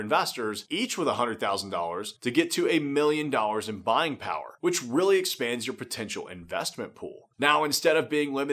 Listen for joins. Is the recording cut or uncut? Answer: uncut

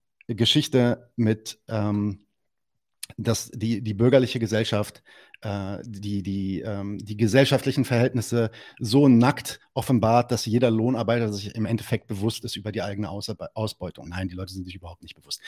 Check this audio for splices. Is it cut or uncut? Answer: cut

